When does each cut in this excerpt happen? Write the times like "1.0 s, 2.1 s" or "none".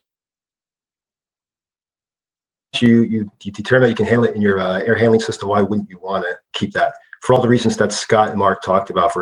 none